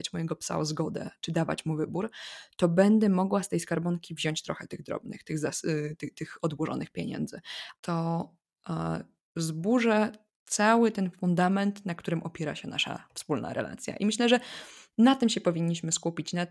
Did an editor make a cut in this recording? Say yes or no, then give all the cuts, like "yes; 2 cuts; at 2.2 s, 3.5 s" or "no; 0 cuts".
yes; 1 cut; at 7.8 s